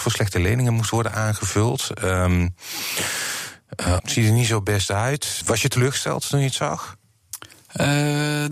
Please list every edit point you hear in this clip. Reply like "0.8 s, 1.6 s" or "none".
4.0 s, 5.4 s